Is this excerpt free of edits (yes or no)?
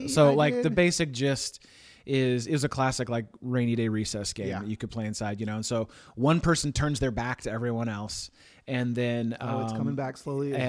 yes